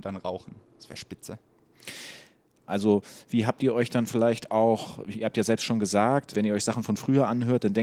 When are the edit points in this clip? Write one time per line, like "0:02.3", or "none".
0:02.7
0:06.3